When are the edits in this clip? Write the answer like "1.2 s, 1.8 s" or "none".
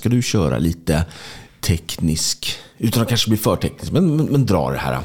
none